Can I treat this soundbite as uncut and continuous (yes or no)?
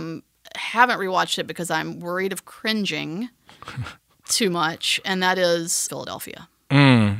no